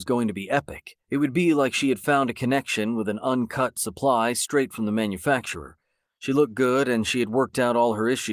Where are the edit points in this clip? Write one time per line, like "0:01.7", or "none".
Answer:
0:01.0
0:06.1